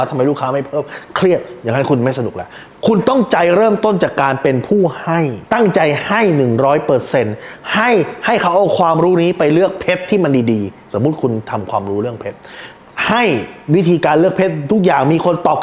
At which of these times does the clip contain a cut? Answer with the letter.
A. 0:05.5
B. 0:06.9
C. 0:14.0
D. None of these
A